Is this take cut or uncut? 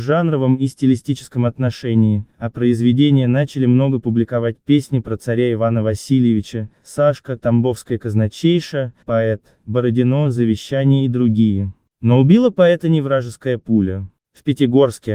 cut